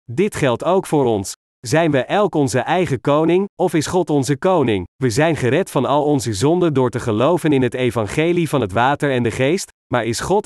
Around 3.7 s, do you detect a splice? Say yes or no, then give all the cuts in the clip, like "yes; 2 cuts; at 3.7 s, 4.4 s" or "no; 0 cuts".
no; 2 cuts; at 1.5 s, 4.9 s